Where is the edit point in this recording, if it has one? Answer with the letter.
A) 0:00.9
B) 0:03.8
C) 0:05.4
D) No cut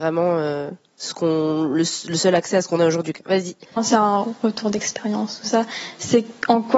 B